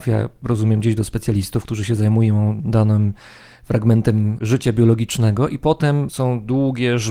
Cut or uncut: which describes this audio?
uncut